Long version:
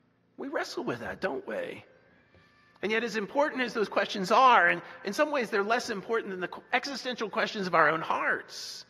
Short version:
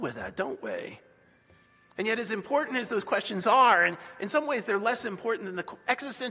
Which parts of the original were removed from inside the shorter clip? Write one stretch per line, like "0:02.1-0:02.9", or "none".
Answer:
none